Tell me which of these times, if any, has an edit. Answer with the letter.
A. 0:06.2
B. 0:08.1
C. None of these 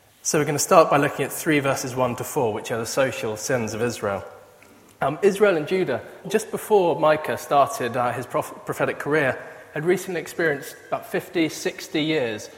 A